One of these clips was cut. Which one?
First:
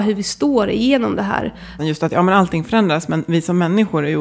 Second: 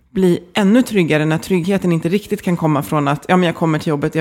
first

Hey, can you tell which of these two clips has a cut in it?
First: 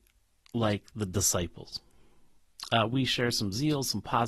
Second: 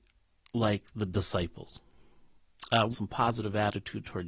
second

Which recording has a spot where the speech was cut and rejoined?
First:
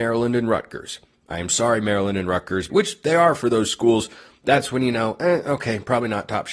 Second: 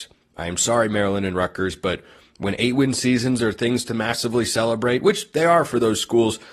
first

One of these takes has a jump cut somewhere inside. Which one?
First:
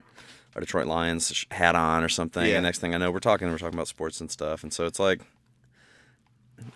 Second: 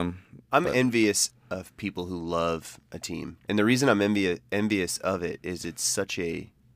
second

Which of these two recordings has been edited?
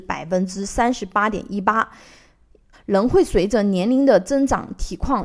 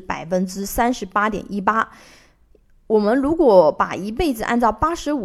first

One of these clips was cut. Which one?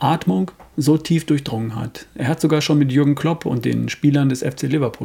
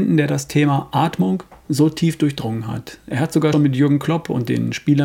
second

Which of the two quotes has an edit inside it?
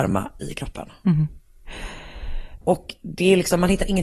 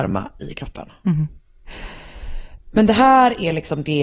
first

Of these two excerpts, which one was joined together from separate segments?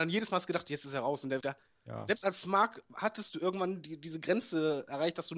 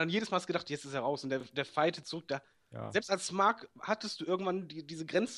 first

